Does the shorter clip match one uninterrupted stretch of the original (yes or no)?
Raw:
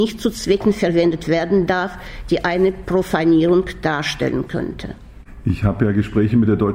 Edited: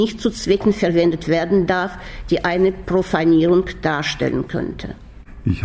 yes